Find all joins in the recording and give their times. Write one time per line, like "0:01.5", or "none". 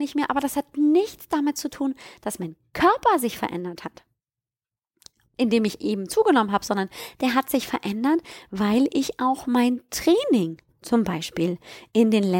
none

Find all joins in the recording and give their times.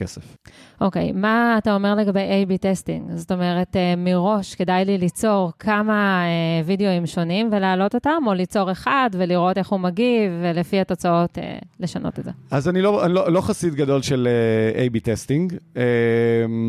none

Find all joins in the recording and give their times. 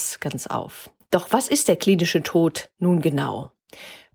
0:01.0

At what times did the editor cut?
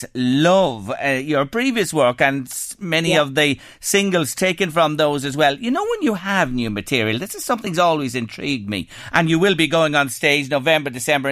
none

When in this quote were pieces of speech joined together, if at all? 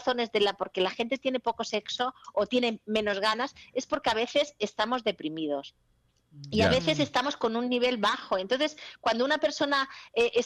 none

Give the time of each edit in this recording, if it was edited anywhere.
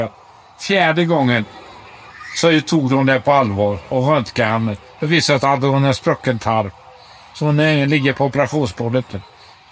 none

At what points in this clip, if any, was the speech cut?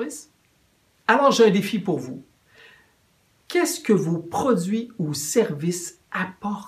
0:00.9

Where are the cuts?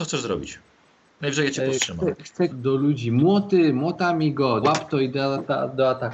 0:02.5
0:04.6

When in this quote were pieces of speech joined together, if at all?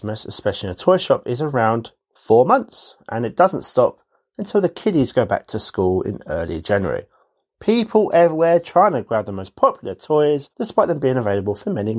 0:07.5
0:10.5

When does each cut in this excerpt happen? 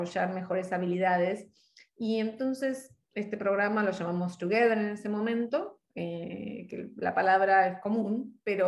none

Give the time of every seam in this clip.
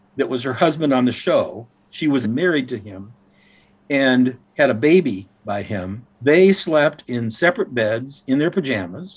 0:02.2
0:06.1

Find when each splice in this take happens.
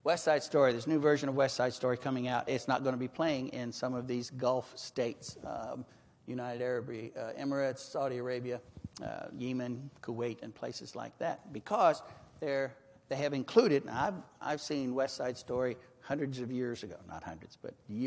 0:02.5

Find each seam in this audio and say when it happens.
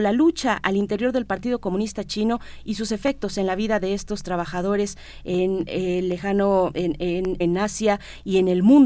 0:05.7
0:07.4

